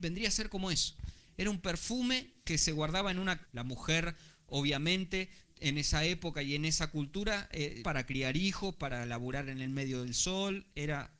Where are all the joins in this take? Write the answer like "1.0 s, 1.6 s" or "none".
2.4 s, 3.4 s, 7.8 s